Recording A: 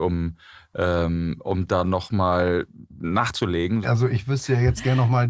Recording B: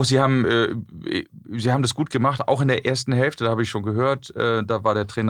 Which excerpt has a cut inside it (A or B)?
A